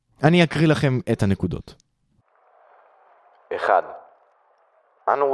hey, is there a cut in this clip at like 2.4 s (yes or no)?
no